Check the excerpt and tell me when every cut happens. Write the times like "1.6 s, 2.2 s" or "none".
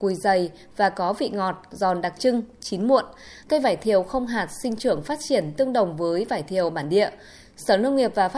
3.4 s